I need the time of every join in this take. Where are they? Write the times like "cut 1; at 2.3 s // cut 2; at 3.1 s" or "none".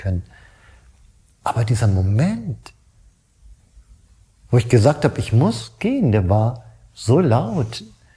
none

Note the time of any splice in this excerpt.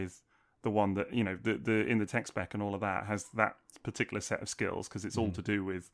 none

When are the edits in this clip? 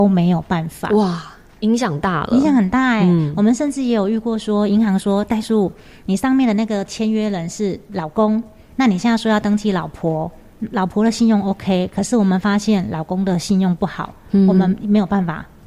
cut 1; at 13.8 s

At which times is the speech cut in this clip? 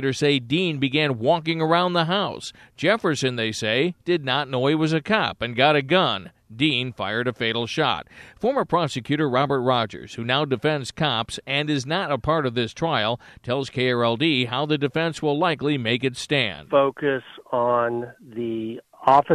none

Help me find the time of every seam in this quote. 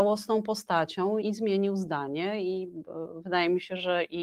cut 1; at 1.2 s

